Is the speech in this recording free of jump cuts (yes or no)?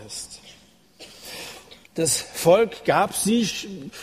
no